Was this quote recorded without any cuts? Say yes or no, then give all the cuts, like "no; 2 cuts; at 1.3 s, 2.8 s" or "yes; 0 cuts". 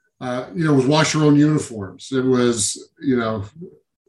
yes; 0 cuts